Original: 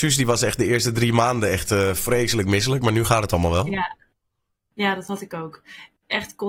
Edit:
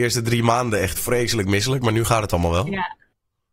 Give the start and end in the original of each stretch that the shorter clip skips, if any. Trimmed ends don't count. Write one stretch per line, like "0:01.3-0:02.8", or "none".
0:01.7-0:02.0